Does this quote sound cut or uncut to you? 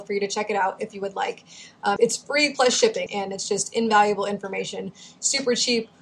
cut